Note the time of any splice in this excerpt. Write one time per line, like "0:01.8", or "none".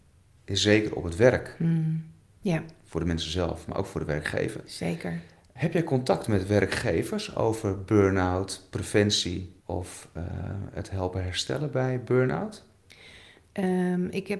0:02.4
0:09.6